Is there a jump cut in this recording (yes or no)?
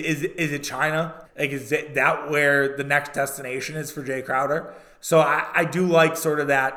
yes